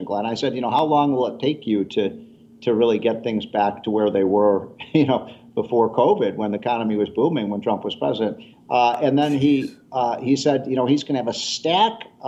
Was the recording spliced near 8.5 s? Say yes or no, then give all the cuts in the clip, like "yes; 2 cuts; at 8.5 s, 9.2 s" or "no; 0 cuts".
yes; 1 cut; at 8.5 s